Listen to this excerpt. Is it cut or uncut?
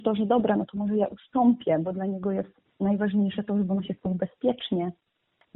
uncut